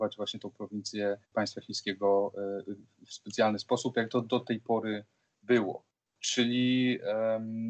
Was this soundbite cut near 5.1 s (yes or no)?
no